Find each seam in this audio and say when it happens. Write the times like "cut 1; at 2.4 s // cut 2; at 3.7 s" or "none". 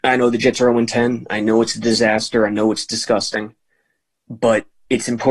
none